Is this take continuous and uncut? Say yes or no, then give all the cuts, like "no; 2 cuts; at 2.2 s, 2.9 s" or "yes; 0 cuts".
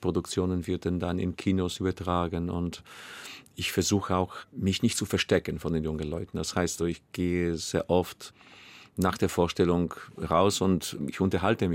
no; 1 cut; at 6.8 s